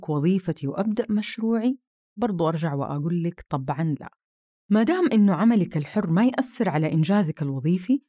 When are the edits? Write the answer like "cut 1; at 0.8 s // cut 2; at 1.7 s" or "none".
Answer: cut 1; at 2.2 s